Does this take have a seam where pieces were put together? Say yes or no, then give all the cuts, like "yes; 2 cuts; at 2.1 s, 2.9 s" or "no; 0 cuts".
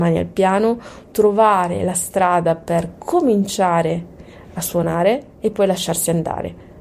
yes; 1 cut; at 5.3 s